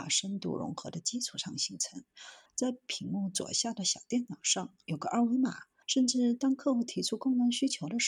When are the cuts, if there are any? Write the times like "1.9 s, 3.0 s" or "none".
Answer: 2.5 s, 5.8 s